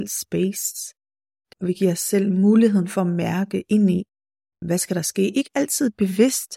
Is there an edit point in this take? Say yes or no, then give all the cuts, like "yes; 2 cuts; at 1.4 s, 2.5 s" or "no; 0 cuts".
yes; 2 cuts; at 1.5 s, 4.6 s